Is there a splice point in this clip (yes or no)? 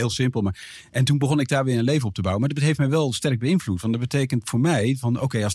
no